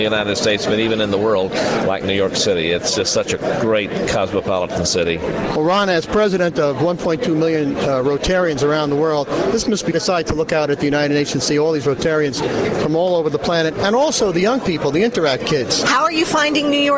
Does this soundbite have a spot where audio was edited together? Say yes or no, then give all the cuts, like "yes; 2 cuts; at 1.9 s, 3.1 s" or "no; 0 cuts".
yes; 2 cuts; at 9.9 s, 15.8 s